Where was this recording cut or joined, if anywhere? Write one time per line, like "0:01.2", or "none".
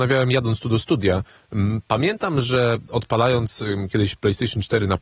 0:03.9